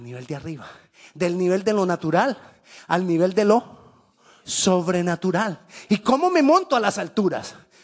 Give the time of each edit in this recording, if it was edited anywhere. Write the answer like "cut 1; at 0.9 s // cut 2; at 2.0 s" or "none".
cut 1; at 5.9 s